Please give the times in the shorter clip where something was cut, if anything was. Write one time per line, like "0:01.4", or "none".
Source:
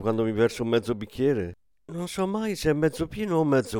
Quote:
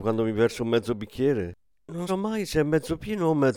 0:02.1